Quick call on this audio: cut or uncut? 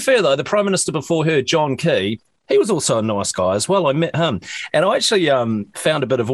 uncut